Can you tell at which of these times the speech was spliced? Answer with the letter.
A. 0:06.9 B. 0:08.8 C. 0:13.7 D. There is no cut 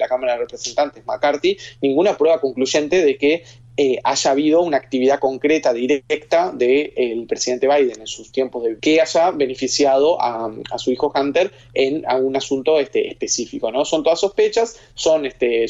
B